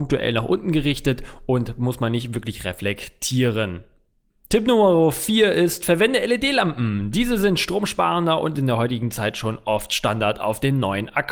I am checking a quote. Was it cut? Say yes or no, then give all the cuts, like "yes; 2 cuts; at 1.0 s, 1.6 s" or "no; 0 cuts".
no; 0 cuts